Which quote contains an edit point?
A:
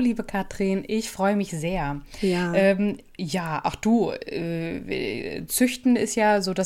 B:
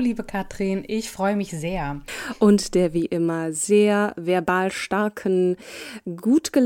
B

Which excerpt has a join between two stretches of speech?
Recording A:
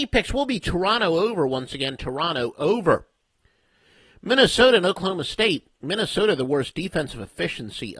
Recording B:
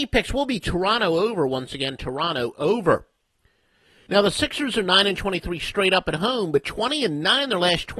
B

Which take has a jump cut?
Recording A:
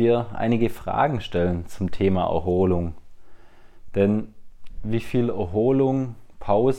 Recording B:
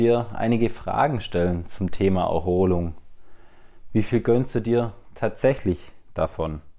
B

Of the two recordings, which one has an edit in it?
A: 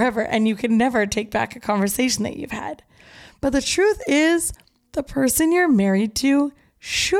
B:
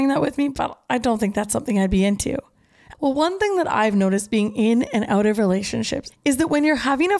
B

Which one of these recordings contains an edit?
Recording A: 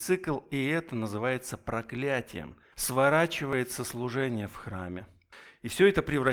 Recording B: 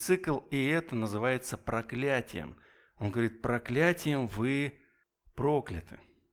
A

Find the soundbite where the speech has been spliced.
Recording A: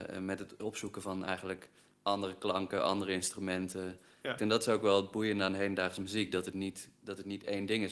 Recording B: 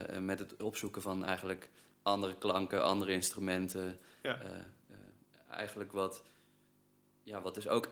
A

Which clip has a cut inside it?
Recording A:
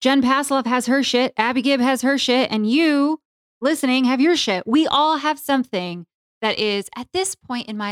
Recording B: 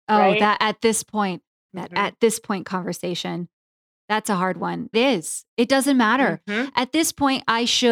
B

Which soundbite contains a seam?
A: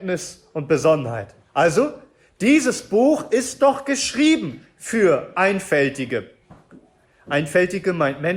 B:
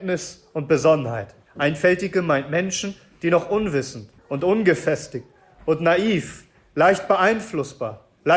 B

